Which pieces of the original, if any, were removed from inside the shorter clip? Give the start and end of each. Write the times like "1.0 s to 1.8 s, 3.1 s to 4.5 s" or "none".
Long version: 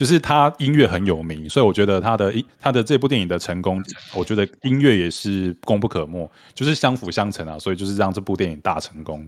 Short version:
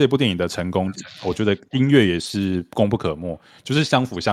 none